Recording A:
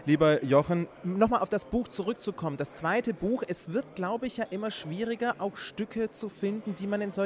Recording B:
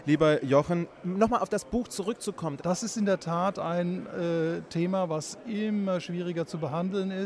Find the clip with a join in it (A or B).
B